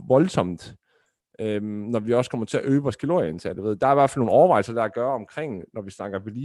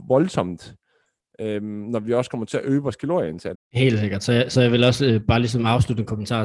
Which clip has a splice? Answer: second; 1 cut; at 3.5 s

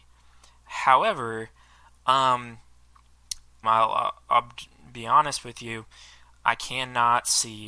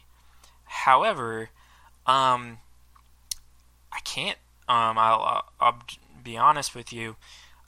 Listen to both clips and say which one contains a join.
first; 2 cuts; at 3.6 s, 6.4 s

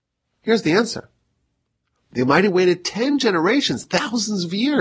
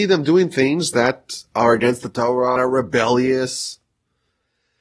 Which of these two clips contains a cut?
second; 1 cut; at 2.6 s

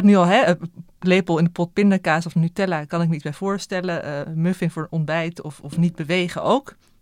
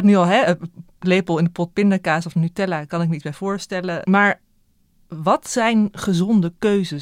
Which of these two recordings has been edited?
second; 1 cut; at 4.0 s

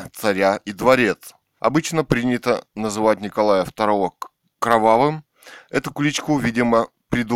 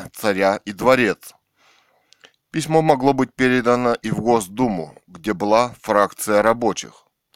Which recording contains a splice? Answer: first; 1 cut; at 1.6 s

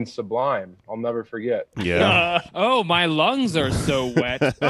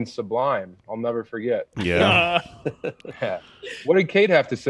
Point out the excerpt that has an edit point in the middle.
first; 1 cut; at 2.5 s

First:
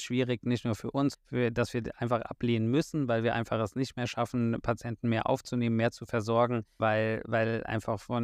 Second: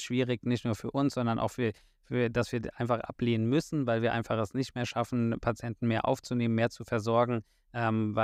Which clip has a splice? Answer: first; 2 cuts; at 1.1 s, 6.8 s

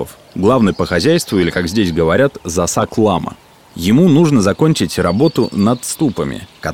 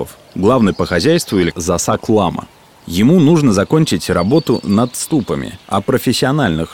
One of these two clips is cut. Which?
second; 2 cuts; at 1.5 s, 5.6 s

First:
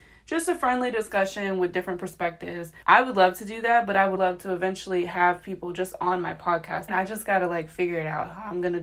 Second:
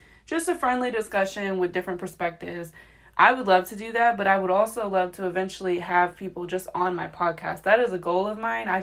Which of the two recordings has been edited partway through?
first; 3 cuts; at 2.8 s, 4.2 s, 6.9 s

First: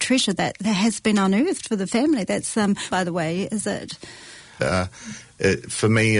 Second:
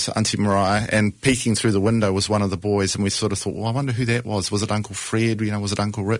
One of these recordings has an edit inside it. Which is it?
first; 2 cuts; at 2.9 s, 4.6 s

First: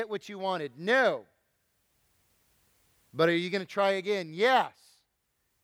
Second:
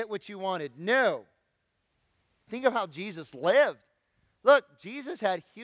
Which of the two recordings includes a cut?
second; 1 cut; at 2.5 s

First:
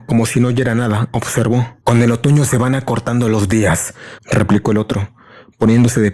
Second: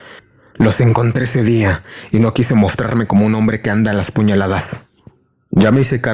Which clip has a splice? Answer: first; 2 cuts; at 1.8 s, 4.2 s

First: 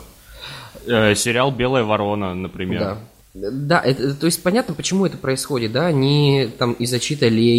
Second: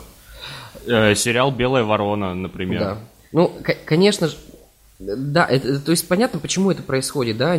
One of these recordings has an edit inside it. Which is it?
first; 1 cut; at 3.2 s

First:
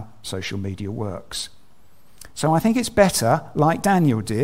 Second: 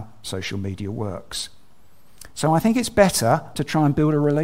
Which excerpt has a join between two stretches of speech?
second; 1 cut; at 3.5 s

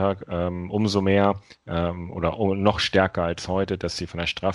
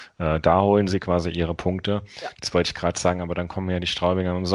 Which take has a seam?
second; 1 cut; at 2.3 s

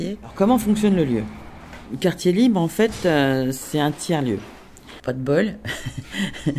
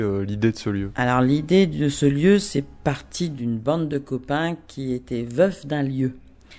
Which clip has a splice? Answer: first; 1 cut; at 5.0 s

